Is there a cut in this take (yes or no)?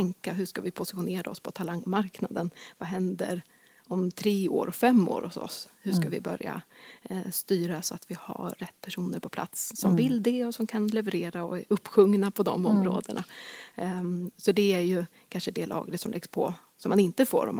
yes